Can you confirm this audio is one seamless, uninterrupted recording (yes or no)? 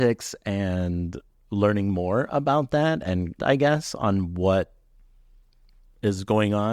no